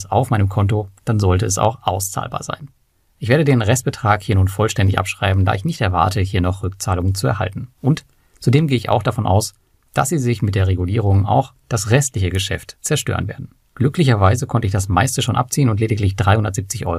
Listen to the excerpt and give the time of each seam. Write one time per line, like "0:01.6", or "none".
none

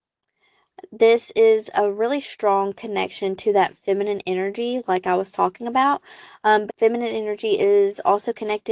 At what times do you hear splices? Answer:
0:06.7

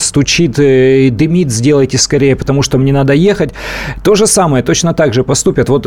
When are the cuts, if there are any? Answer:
none

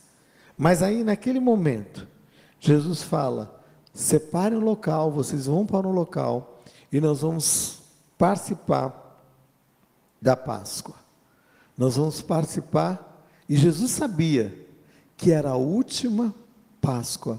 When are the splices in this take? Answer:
none

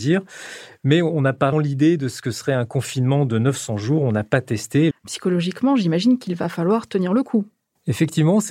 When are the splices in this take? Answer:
0:01.5
0:04.9

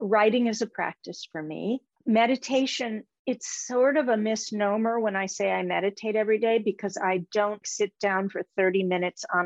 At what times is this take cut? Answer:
0:07.6

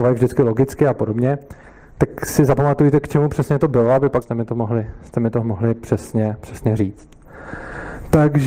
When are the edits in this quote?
0:04.2

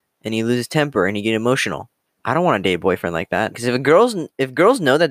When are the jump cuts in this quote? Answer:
0:03.5

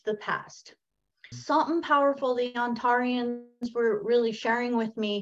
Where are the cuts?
0:01.3

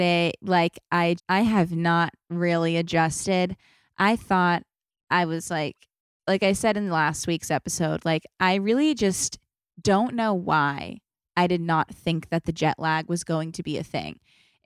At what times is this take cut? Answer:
0:01.2

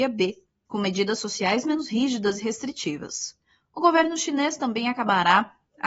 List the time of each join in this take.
none

